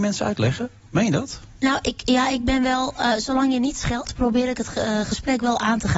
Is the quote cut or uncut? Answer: uncut